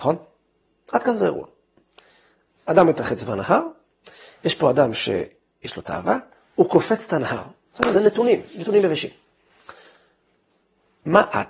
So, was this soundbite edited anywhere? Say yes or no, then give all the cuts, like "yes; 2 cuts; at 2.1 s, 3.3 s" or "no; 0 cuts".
no; 0 cuts